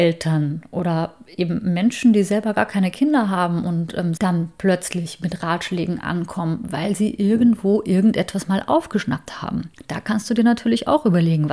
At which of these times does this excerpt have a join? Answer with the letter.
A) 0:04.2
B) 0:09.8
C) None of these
A